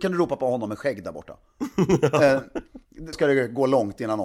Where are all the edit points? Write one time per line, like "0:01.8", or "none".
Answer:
0:03.1